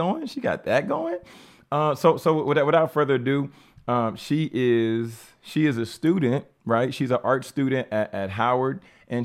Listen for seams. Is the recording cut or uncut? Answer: uncut